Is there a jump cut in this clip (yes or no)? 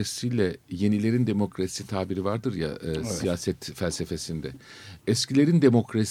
no